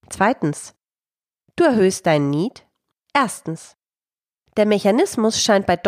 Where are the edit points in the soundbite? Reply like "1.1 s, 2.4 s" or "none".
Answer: 1.4 s, 3.0 s